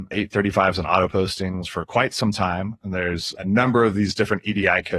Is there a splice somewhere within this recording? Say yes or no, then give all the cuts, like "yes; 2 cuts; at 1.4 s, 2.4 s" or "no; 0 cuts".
no; 0 cuts